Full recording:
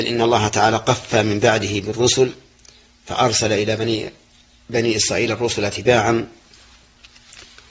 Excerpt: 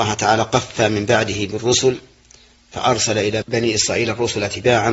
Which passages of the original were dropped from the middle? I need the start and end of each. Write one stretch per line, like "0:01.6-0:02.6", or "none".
0:03.8-0:04.6